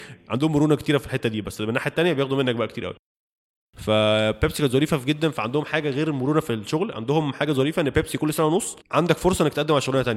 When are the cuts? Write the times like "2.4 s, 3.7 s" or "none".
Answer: 8.8 s

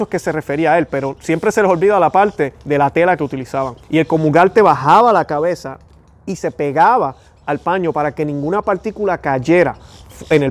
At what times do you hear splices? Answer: 3.8 s

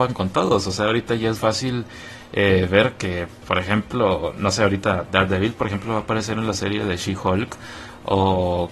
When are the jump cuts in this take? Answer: 1.4 s

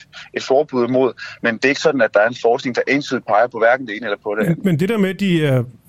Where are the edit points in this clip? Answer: none

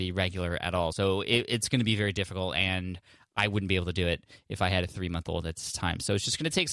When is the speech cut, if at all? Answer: none

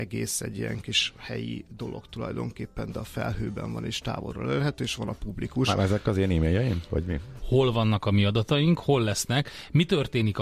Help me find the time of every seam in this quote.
7.4 s

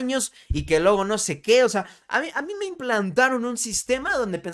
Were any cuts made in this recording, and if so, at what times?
none

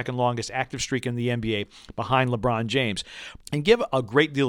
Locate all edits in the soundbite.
3.4 s

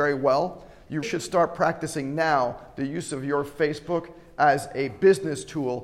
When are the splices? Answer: 1.0 s

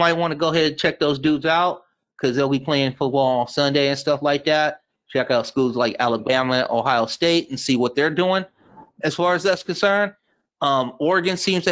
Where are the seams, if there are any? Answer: none

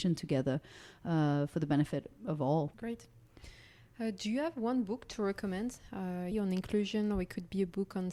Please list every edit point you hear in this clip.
2.7 s, 6.3 s

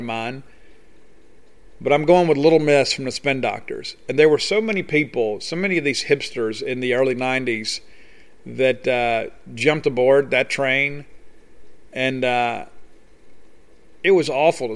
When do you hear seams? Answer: none

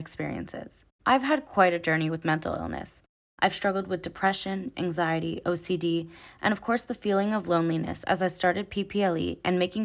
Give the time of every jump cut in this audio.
0.9 s, 4.7 s

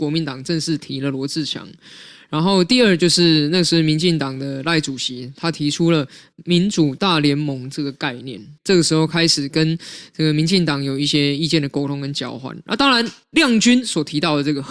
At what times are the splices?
8.6 s

